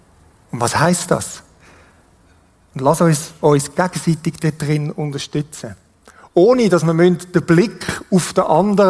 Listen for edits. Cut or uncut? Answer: uncut